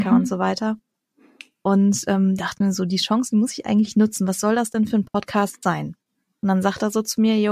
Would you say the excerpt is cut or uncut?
uncut